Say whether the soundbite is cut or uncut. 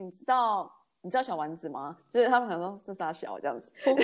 uncut